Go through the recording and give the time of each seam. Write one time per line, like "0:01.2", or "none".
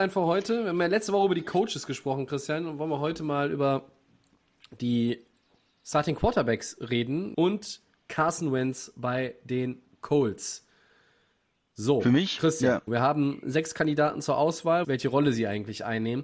0:07.3
0:12.9
0:14.8